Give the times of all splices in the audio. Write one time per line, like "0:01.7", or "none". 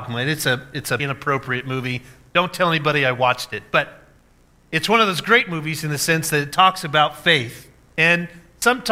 0:01.0